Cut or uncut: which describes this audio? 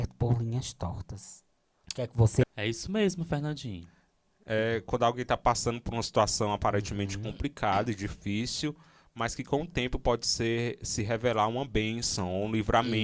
cut